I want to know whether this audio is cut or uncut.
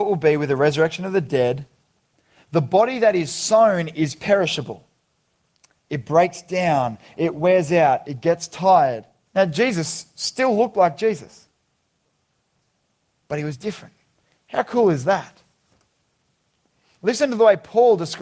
cut